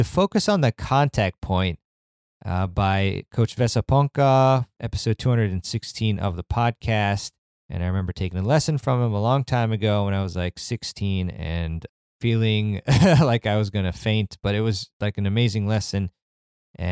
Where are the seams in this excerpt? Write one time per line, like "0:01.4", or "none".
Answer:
0:07.6